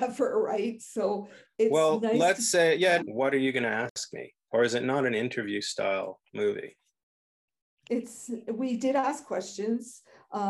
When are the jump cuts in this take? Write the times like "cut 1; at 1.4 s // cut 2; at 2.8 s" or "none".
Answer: cut 1; at 3.0 s